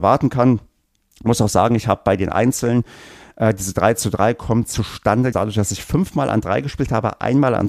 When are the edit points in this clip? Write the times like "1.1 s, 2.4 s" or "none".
5.3 s